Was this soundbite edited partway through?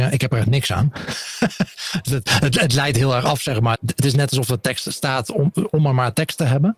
yes; 1 cut; at 3.7 s

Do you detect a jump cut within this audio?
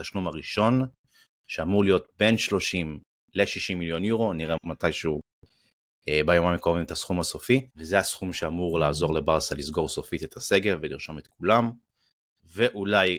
yes; 2 cuts; at 4.6 s, 7.7 s

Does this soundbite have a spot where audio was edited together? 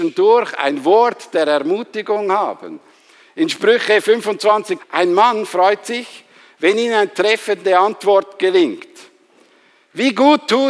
yes; 1 cut; at 4.8 s

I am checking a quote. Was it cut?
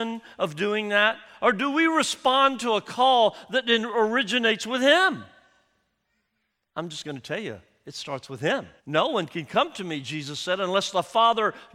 yes; 1 cut; at 8.8 s

